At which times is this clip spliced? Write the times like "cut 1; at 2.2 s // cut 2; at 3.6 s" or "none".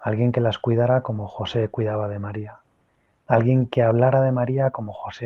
none